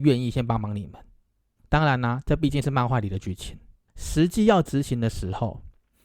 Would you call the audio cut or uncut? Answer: cut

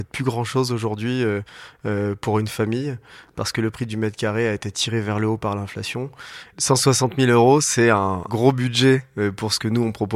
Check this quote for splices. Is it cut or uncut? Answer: cut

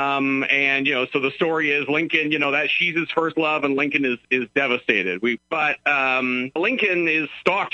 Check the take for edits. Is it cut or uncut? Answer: cut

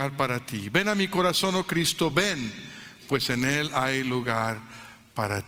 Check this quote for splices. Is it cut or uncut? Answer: uncut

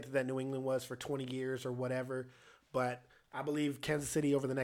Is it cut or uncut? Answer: uncut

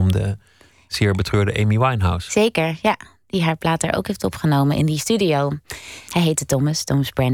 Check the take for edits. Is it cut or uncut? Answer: cut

